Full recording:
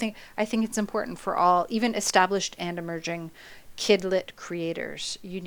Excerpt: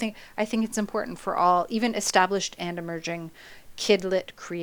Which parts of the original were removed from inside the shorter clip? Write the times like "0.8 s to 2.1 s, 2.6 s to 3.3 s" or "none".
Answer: none